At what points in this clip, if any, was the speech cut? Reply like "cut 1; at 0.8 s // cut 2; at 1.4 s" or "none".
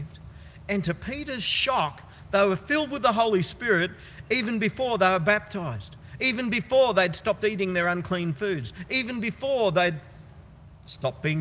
none